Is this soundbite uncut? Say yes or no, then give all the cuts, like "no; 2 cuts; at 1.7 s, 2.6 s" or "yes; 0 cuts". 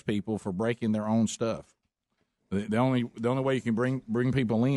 yes; 0 cuts